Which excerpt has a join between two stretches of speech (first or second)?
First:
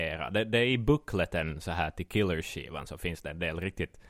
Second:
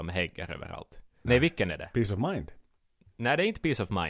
second